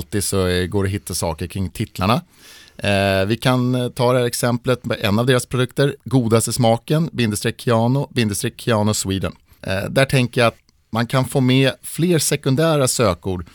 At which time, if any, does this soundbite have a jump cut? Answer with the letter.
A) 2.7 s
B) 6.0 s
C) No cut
B